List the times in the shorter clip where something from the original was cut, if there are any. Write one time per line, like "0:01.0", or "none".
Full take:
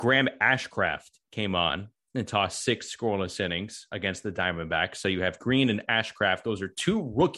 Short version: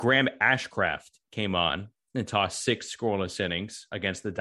none

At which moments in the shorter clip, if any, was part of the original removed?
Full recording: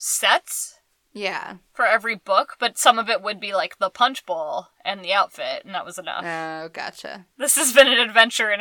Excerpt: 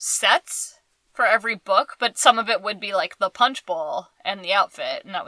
0:01.1

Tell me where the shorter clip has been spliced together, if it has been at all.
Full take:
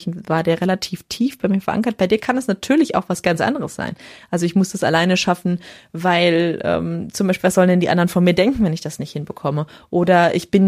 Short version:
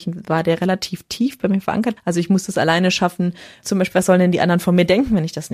0:02.0
0:03.6

